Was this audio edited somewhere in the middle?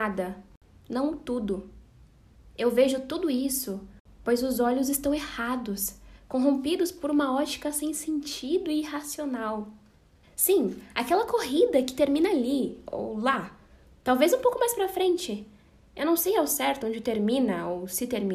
yes; 1 cut; at 10.2 s

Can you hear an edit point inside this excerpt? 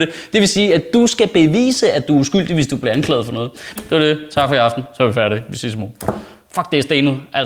yes; 1 cut; at 3.8 s

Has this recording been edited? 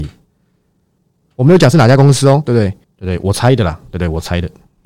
yes; 2 cuts; at 1.2 s, 2.8 s

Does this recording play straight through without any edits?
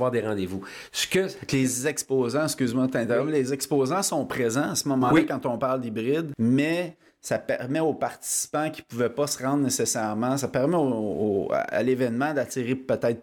yes; 0 cuts

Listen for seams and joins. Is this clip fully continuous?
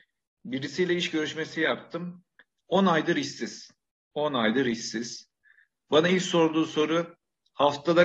yes; 0 cuts

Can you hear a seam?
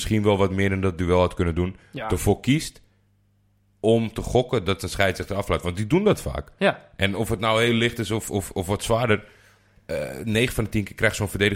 no; 0 cuts

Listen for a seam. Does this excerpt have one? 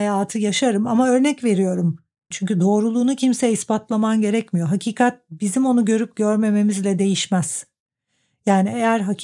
yes; 1 cut; at 2.3 s

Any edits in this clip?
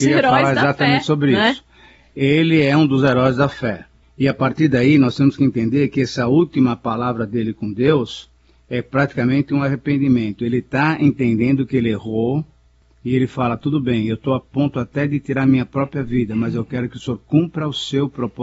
no; 0 cuts

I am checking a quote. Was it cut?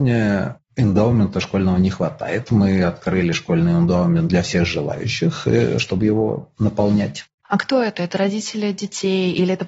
yes; 1 cut; at 7.4 s

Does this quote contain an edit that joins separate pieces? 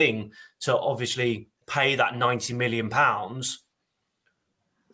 no; 0 cuts

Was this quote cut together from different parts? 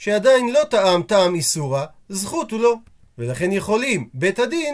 no; 0 cuts

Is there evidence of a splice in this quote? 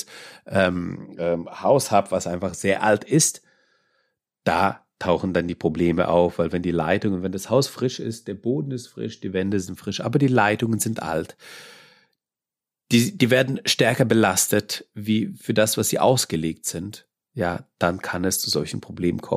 no; 0 cuts

